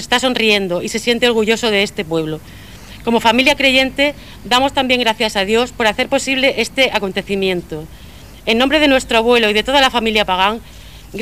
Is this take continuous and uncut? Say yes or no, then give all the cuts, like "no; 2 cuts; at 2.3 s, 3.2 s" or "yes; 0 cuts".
yes; 0 cuts